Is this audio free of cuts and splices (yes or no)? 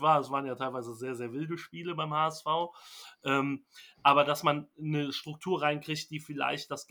yes